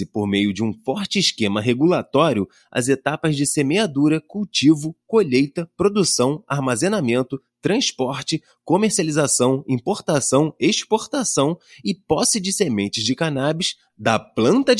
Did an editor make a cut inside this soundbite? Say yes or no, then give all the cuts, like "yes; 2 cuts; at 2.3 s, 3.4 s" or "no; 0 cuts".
no; 0 cuts